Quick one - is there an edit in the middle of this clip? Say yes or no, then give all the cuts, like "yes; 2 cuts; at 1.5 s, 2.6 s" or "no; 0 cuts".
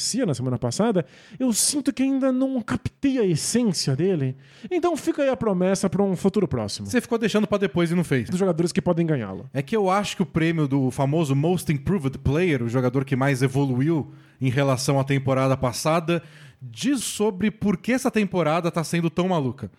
yes; 2 cuts; at 8.3 s, 17.0 s